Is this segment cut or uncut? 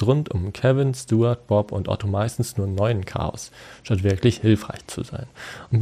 uncut